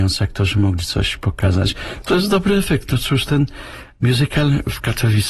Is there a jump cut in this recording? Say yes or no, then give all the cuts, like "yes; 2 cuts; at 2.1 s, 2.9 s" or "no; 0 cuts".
yes; 1 cut; at 2.0 s